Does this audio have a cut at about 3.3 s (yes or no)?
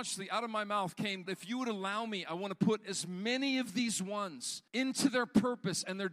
no